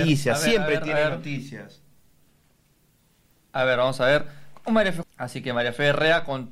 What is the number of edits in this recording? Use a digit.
1